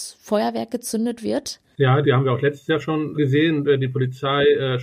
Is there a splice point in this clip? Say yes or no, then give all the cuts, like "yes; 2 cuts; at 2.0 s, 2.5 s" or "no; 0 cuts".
yes; 2 cuts; at 2.0 s, 3.1 s